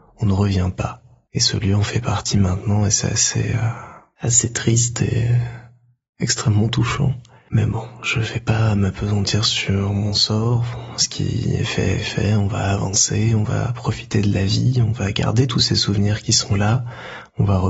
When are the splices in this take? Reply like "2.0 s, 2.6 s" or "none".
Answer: none